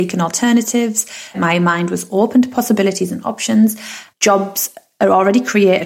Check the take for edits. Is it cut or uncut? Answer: cut